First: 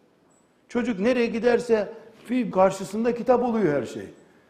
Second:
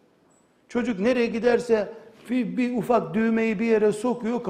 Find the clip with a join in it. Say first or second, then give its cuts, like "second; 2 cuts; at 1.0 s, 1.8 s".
first; 1 cut; at 2.5 s